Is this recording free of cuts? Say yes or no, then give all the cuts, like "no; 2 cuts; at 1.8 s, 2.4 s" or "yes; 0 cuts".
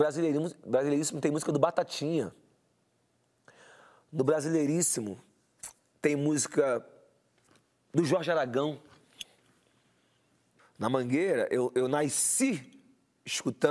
no; 1 cut; at 10.6 s